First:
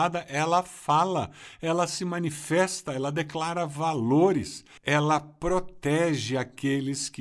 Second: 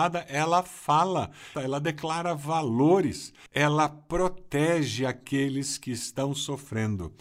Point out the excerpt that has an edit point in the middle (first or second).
second